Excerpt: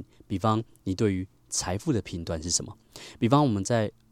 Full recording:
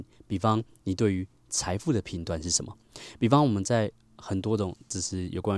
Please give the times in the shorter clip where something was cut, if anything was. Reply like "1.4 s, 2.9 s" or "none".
none